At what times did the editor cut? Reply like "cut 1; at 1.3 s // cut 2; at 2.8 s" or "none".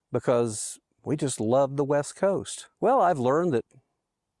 cut 1; at 2.7 s